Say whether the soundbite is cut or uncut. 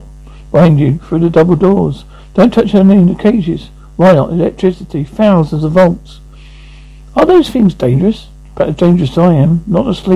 uncut